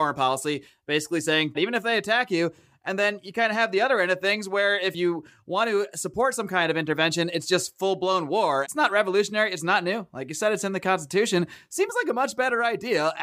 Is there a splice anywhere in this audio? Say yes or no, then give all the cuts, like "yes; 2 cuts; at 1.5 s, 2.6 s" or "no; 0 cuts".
yes; 2 cuts; at 1.5 s, 8.6 s